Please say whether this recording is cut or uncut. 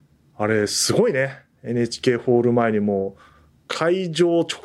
uncut